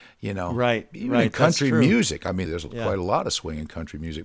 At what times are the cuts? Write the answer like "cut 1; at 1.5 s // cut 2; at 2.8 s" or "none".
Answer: cut 1; at 2.5 s

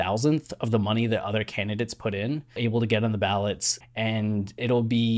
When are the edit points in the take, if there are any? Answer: cut 1; at 2.6 s // cut 2; at 3.8 s

